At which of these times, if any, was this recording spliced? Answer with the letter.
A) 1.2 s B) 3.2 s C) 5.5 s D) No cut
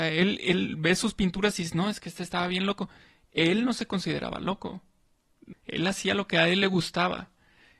C